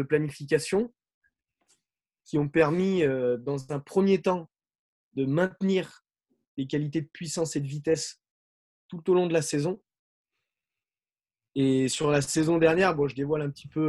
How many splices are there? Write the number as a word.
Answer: zero